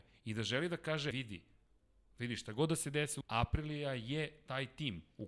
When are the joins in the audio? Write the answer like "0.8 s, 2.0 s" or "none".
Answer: 1.1 s, 3.2 s